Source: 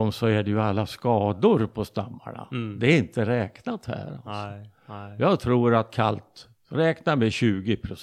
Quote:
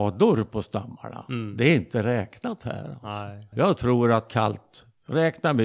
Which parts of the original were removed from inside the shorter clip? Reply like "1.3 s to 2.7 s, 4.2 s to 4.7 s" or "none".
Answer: 4.7 s to 5.1 s

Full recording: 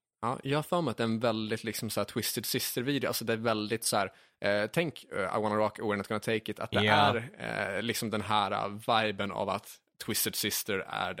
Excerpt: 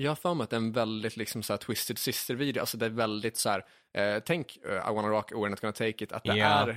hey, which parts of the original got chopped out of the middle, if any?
none

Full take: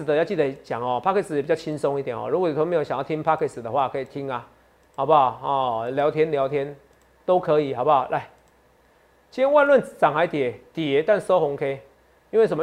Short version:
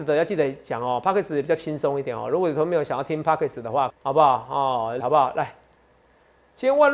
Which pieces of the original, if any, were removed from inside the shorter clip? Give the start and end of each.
3.9 s to 4.8 s, 5.9 s to 7.7 s

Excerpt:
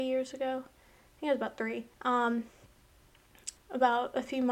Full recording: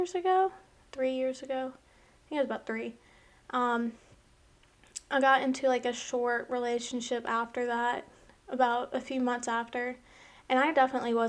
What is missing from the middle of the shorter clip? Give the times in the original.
3.0 s to 3.4 s, 5.1 s to 8.3 s

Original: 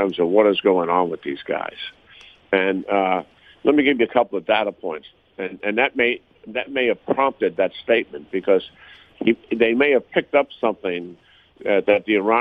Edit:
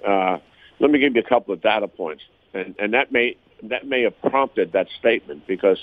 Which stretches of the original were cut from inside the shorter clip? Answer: none

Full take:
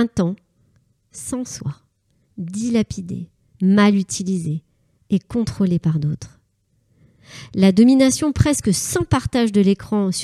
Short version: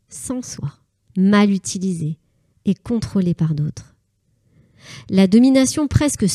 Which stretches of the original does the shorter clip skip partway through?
2.1 s to 3.5 s

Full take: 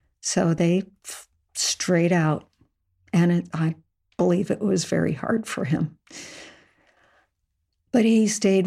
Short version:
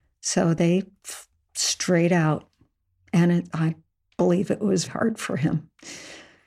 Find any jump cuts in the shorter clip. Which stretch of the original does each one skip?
4.9 s to 5.1 s

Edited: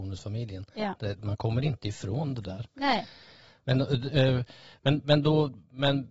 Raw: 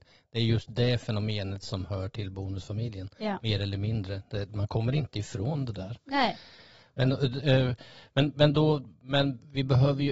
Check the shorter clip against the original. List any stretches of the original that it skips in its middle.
3.4 s to 4.3 s

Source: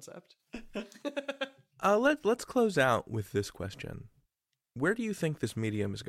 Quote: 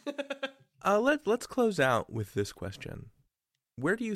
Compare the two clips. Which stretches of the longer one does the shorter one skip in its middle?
none

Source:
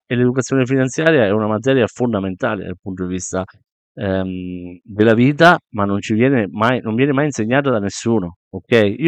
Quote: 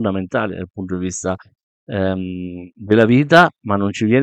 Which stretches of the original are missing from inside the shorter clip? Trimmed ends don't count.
none

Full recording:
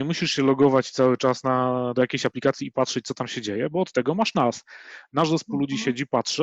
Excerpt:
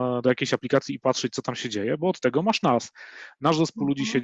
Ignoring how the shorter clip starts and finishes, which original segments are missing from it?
none

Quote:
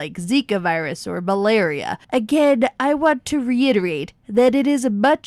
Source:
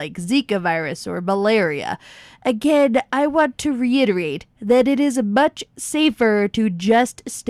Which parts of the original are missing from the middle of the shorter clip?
2.0 s to 2.4 s

